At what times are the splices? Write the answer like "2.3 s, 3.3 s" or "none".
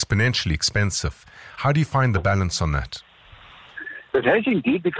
none